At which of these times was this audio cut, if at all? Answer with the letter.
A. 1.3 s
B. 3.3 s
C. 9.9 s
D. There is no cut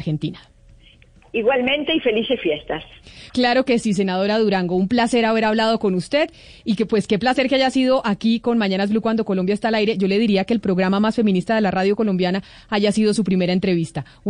B